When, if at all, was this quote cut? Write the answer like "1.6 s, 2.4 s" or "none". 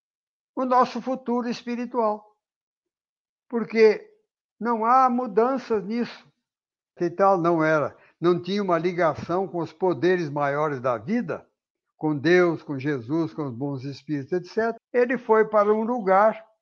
7.0 s, 14.8 s